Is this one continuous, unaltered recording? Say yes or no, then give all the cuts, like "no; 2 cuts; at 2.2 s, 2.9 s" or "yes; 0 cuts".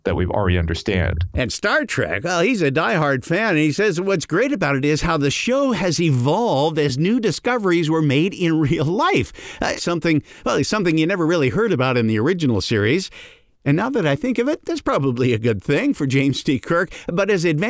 no; 1 cut; at 9.8 s